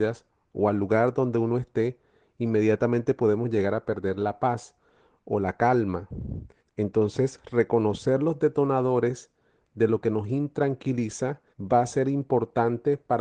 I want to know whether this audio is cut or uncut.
cut